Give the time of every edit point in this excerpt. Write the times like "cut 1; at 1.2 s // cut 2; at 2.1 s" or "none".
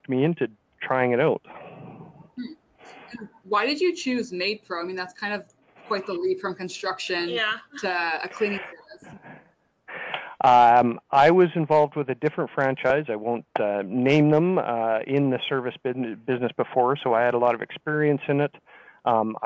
none